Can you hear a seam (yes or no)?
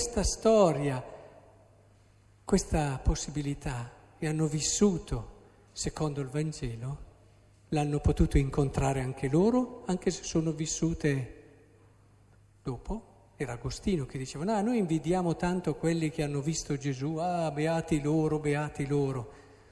no